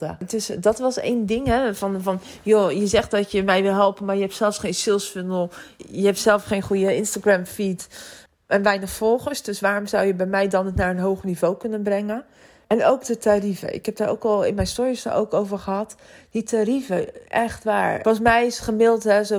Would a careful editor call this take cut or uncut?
uncut